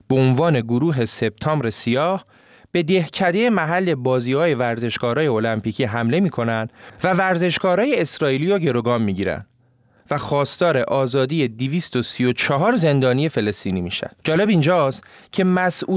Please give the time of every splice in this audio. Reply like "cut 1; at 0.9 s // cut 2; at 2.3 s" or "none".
cut 1; at 14.2 s